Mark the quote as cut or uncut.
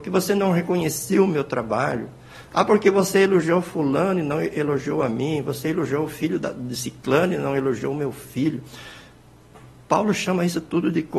uncut